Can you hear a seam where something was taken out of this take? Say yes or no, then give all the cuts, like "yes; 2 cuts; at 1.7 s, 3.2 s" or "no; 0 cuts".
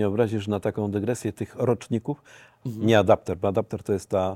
yes; 1 cut; at 2.6 s